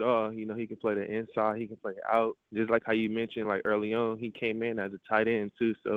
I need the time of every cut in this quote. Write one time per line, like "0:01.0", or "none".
none